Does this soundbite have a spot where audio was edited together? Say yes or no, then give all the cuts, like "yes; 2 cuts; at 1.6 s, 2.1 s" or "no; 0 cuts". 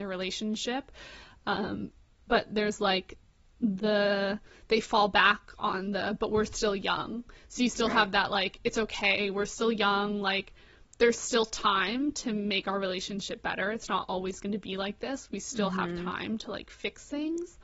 no; 0 cuts